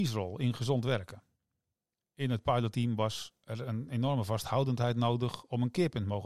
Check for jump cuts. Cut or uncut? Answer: uncut